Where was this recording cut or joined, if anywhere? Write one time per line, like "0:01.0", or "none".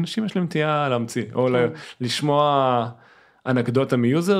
none